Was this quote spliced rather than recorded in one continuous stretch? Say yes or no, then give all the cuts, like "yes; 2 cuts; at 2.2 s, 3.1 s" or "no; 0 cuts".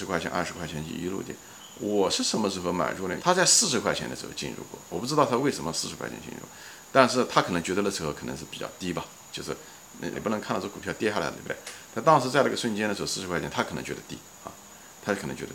yes; 3 cuts; at 3.2 s, 10.1 s, 11.3 s